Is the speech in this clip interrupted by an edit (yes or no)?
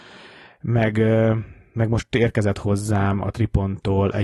no